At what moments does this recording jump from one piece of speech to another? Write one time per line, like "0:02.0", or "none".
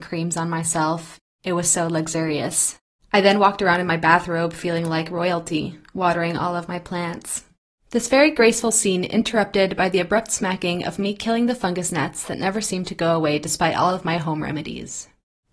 none